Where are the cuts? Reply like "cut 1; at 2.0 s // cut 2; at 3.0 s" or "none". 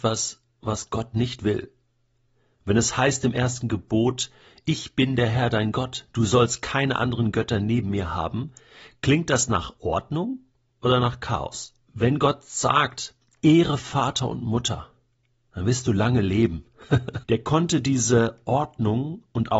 cut 1; at 11.9 s // cut 2; at 17.2 s